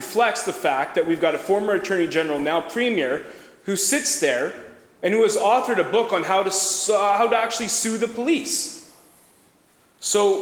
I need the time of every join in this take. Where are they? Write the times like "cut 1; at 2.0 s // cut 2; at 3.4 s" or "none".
none